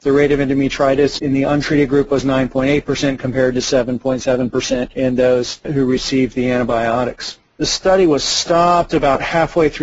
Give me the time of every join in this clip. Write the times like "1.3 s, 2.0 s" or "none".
none